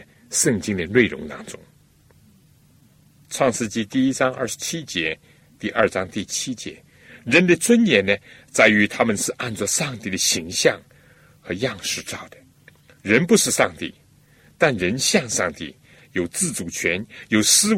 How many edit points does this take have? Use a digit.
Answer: 1